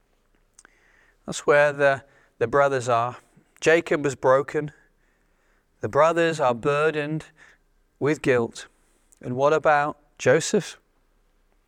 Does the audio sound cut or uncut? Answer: uncut